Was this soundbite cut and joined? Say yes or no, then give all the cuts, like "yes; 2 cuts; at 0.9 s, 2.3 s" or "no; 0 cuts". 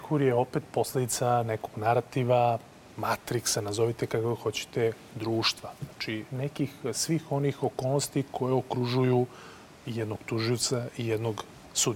no; 0 cuts